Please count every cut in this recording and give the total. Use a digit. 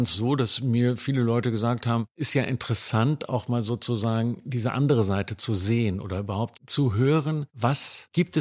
0